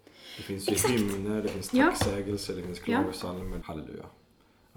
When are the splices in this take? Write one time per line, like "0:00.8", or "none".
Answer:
0:03.6